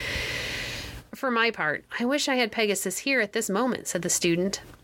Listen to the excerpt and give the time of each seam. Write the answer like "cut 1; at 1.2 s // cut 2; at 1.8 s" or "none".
none